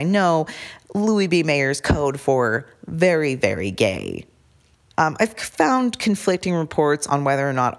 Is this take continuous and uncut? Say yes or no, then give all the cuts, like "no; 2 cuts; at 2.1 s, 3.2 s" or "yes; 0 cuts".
no; 1 cut; at 4.9 s